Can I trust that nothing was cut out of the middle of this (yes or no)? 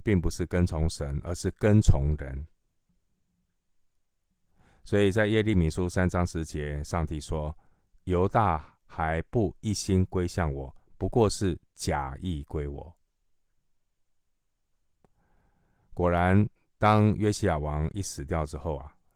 yes